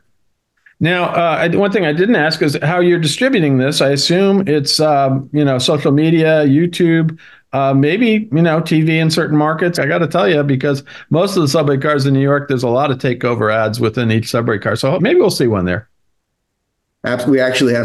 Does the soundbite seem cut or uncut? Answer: cut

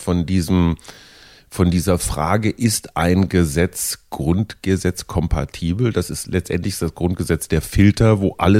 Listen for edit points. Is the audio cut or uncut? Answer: uncut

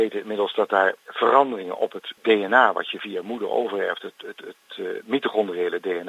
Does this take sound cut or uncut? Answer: cut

